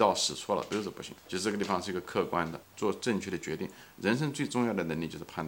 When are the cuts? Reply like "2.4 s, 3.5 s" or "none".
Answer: 1.2 s, 2.6 s